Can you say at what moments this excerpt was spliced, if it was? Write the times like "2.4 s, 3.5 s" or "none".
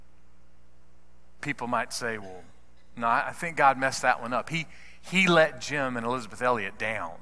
none